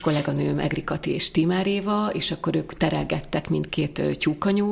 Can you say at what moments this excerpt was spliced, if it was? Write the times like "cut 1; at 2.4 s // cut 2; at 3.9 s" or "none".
cut 1; at 3.7 s